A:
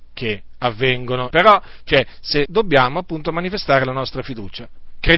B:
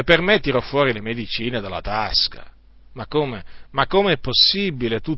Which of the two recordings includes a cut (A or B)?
A